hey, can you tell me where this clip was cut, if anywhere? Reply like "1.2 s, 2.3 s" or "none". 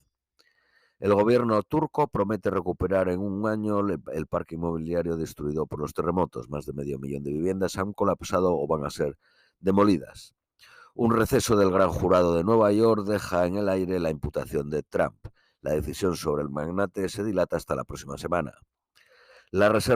none

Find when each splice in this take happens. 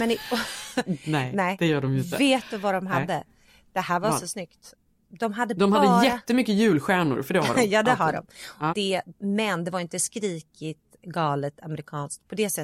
8.7 s

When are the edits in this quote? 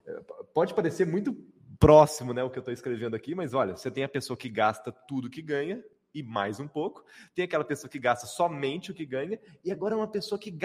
none

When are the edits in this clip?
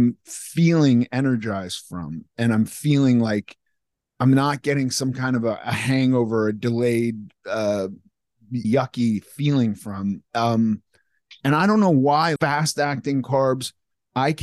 8.6 s, 12.4 s

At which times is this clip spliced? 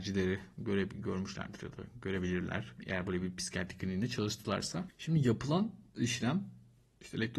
none

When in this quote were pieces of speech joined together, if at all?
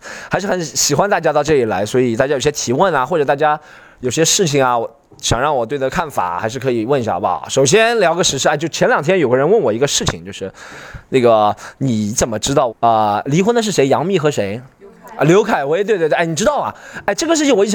12.7 s

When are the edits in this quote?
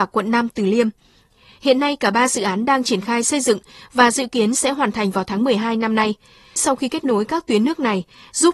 none

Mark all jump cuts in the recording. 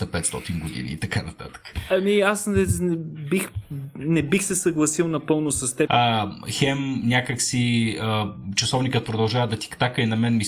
5.9 s

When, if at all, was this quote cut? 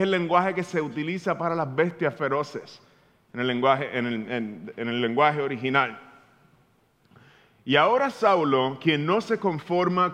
none

